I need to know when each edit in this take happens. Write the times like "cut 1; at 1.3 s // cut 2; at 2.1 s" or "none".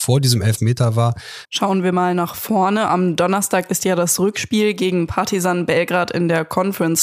cut 1; at 1.4 s